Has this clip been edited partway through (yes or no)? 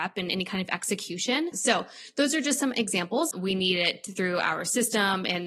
yes